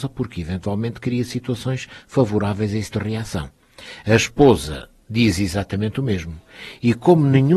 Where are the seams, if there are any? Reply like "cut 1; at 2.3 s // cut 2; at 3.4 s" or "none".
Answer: cut 1; at 2.9 s